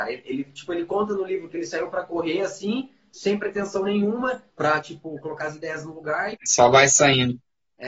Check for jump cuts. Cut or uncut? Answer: cut